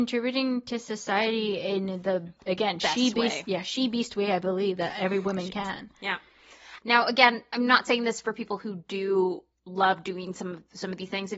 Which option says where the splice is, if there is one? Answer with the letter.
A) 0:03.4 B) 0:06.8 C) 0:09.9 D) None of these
B